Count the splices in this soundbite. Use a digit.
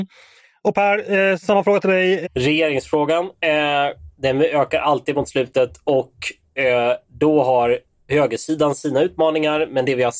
1